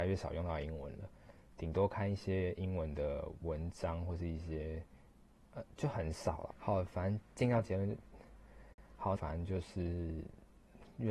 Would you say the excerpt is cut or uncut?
cut